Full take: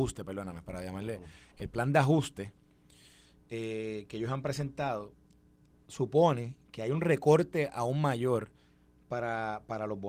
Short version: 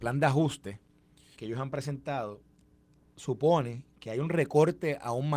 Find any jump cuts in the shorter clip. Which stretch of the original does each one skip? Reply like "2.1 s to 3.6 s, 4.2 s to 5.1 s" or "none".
3.1 s to 4.1 s